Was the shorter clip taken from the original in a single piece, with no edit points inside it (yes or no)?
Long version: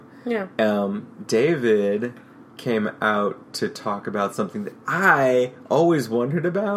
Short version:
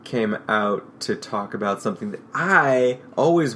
yes